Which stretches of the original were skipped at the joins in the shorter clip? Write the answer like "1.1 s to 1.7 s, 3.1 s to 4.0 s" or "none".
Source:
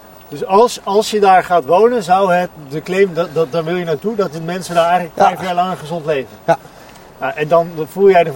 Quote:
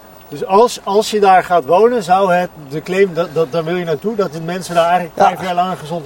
none